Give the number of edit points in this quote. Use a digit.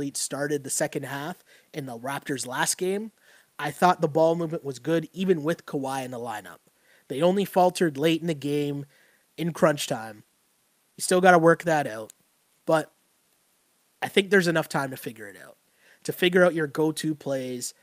0